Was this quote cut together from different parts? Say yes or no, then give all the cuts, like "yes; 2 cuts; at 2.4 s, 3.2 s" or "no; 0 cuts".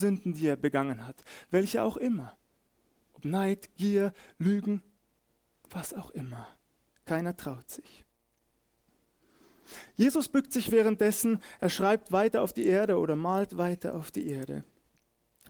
no; 0 cuts